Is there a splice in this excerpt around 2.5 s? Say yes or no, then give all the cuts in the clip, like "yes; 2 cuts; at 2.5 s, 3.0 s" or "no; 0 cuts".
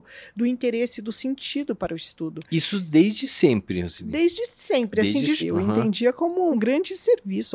no; 2 cuts; at 5.4 s, 6.5 s